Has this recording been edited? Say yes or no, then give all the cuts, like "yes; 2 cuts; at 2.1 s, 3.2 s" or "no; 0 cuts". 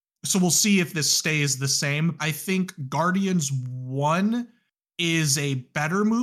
yes; 1 cut; at 2.2 s